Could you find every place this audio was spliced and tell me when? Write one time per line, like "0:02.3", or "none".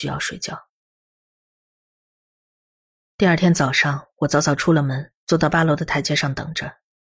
none